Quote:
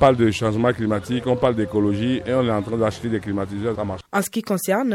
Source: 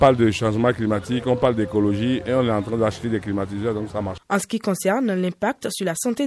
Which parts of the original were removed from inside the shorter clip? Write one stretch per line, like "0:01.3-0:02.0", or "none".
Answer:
0:03.7-0:03.9

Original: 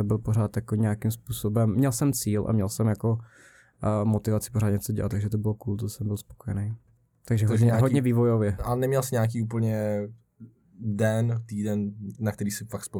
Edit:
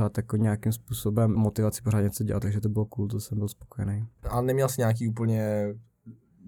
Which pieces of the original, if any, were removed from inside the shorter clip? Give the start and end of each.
0:01.7-0:04.0
0:06.9-0:08.6

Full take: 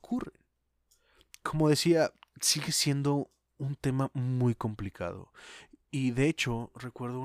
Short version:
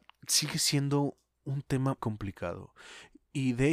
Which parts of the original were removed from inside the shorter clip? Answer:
0:04.1-0:04.6

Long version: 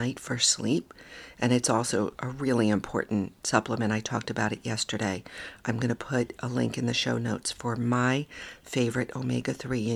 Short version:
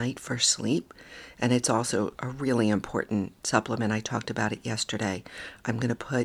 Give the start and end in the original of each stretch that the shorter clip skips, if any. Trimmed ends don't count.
none

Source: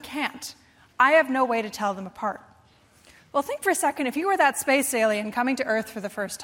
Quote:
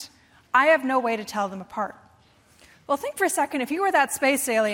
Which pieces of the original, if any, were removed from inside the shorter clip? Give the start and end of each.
none

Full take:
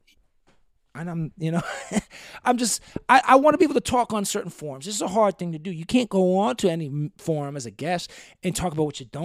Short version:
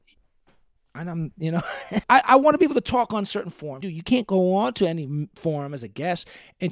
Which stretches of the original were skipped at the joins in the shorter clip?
0:02.0-0:03.0
0:04.8-0:05.6

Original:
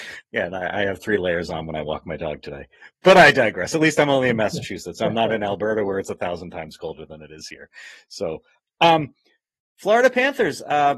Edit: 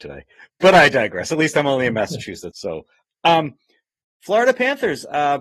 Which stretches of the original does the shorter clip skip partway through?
0:04.9-0:08.1

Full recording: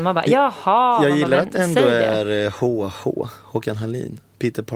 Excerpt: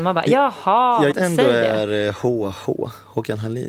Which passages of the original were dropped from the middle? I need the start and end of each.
0:01.1-0:01.5

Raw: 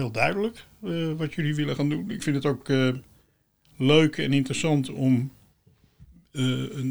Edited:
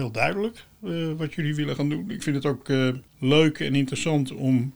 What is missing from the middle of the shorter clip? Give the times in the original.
0:03.1-0:03.7

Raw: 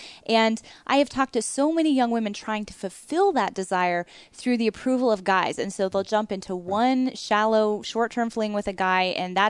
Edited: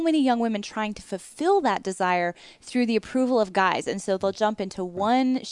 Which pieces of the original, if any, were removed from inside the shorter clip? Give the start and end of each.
none

